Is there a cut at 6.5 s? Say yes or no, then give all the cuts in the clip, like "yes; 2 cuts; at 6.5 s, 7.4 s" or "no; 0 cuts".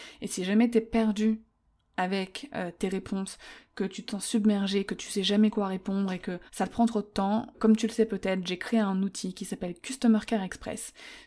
yes; 2 cuts; at 6.5 s, 7.5 s